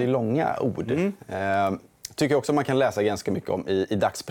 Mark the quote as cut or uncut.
uncut